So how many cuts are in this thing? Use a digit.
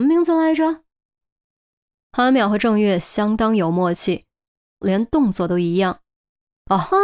2